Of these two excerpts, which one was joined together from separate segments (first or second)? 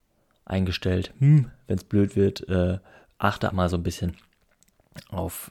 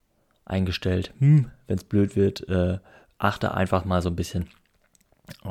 first